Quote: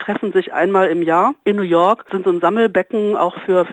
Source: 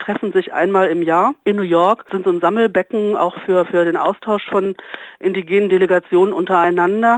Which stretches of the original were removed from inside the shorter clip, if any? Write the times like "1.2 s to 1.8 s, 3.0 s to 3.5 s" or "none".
none